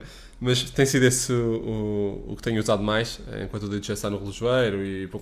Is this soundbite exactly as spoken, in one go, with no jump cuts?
yes; 0 cuts

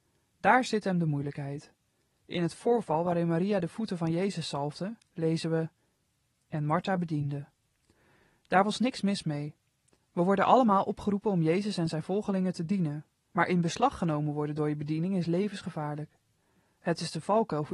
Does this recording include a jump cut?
no; 0 cuts

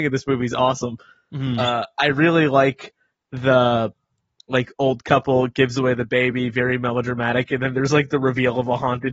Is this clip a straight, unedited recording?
yes; 0 cuts

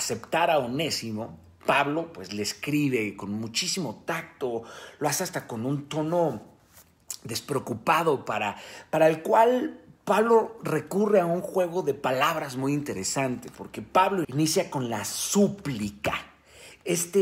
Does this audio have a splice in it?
yes; 1 cut; at 14.2 s

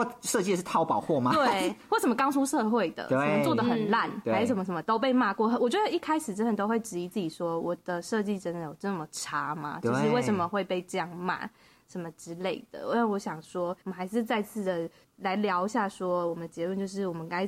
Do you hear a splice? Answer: yes; 2 cuts; at 13.8 s, 15.0 s

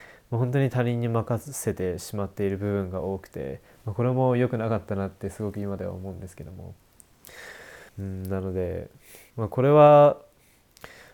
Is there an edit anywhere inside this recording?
yes; 2 cuts; at 7.9 s, 9.3 s

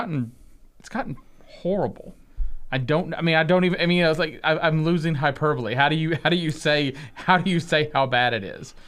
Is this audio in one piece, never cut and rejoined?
yes; 0 cuts

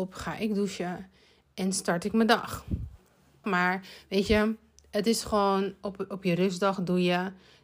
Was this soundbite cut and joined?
yes; 1 cut; at 3.4 s

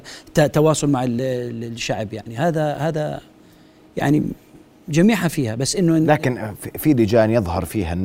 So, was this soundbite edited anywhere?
no; 0 cuts

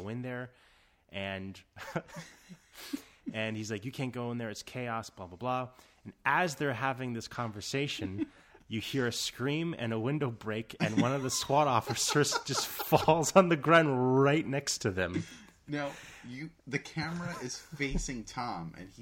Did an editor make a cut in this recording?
no; 0 cuts

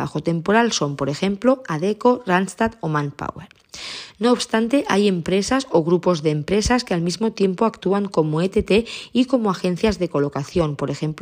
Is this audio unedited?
yes; 0 cuts

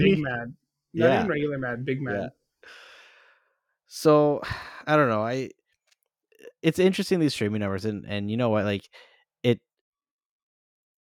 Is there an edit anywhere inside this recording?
no; 0 cuts

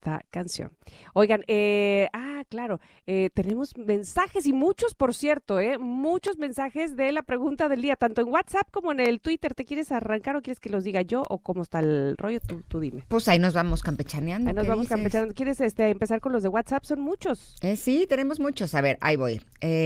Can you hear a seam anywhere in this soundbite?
no; 0 cuts

